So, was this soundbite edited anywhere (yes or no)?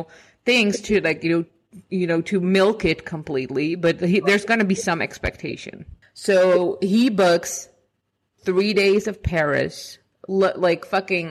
yes